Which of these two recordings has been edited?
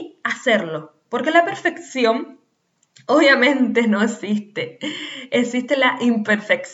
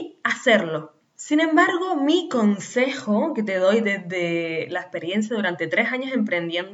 second; 1 cut; at 1.0 s

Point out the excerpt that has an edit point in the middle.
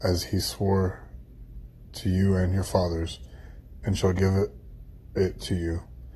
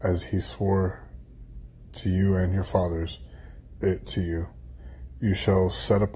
second; 1 cut; at 3.8 s

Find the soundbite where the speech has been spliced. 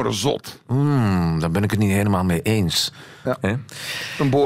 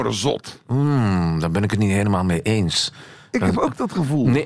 first; 1 cut; at 3.2 s

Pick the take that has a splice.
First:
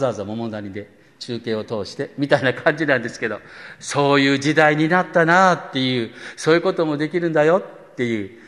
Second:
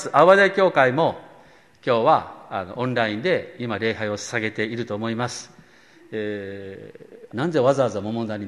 second; 1 cut; at 7.3 s

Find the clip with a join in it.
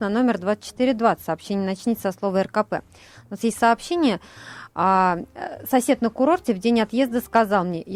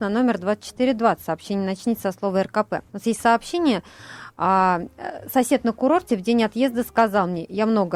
second; 1 cut; at 2.9 s

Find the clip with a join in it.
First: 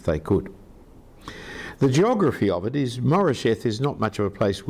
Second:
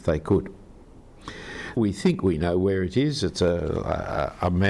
second; 1 cut; at 1.8 s

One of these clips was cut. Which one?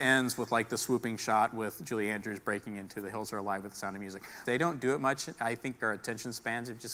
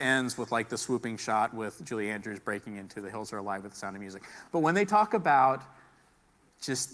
first; 2 cuts; at 4.4 s, 5.8 s

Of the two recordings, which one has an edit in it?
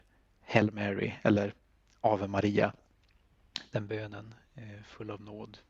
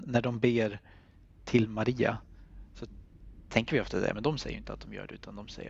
second; 1 cut; at 4.1 s

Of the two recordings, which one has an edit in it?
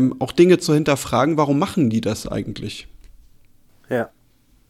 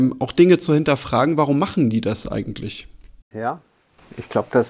second; 1 cut; at 3.2 s

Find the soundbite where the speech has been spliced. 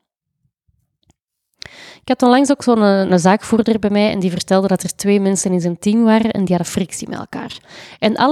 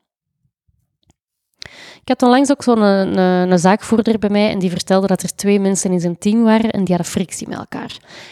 first; 1 cut; at 3.1 s

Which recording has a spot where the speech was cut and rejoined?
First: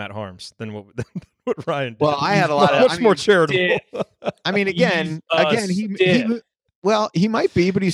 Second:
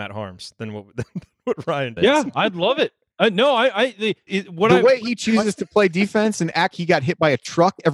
second; 3 cuts; at 2.0 s, 4.3 s, 6.7 s

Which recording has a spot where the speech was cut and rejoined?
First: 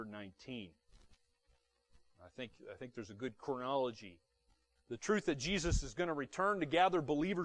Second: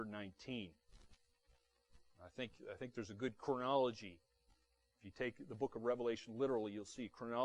first; 1 cut; at 4.8 s

